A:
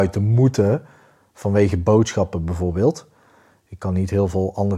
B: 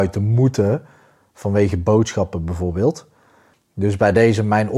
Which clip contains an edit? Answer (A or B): B